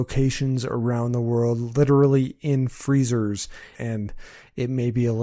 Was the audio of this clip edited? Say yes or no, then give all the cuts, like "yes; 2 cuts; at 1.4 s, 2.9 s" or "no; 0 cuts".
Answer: yes; 1 cut; at 3.7 s